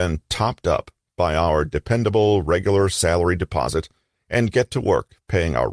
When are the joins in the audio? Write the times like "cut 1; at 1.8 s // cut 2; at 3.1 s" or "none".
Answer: none